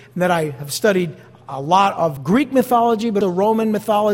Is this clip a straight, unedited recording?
no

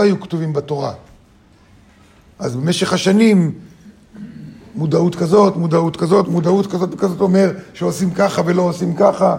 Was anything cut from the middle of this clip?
yes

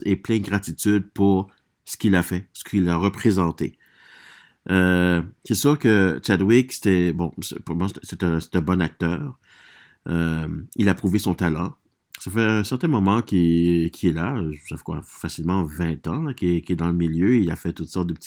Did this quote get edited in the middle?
no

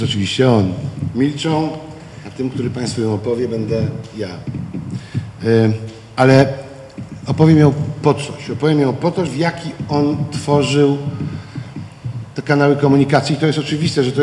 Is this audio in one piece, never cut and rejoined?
no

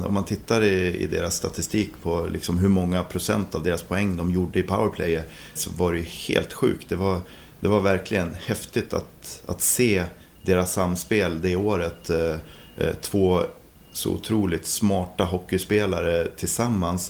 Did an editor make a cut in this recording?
yes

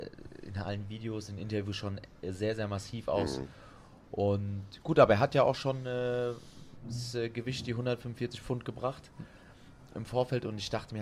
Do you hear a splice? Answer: no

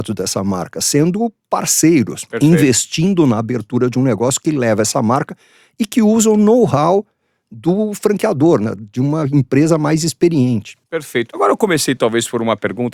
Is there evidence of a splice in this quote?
no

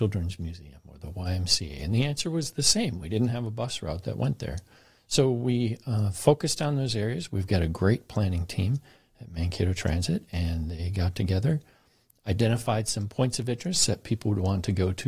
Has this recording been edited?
no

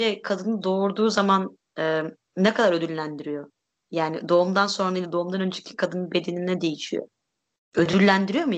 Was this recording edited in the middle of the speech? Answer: no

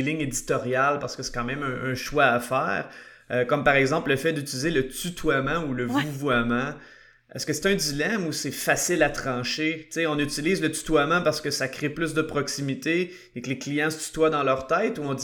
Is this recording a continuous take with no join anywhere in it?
yes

